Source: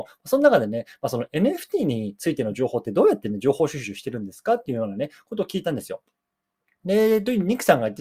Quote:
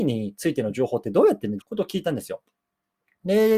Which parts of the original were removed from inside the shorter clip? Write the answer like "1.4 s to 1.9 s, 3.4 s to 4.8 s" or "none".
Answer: 3.4 s to 5.2 s